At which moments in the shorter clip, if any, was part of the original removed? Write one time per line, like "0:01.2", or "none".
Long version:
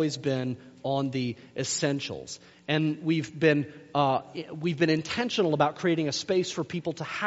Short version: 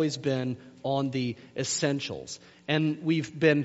none